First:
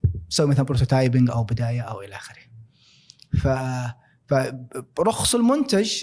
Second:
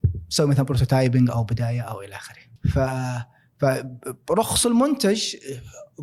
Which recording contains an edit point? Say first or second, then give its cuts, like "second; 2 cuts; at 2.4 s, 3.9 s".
second; 1 cut; at 2.6 s